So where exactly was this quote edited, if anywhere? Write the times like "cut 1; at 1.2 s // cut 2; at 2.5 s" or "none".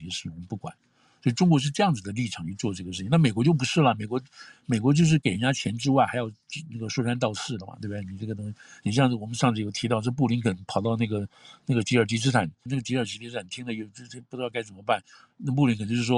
cut 1; at 12.7 s